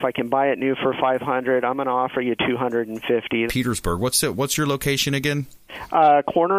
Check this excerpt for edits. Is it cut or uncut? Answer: cut